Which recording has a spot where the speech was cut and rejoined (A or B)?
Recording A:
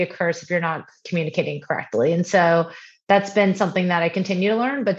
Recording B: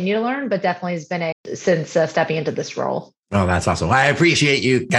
B